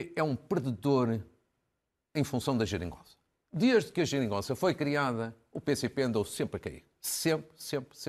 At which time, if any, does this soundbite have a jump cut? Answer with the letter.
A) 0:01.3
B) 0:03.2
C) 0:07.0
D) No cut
D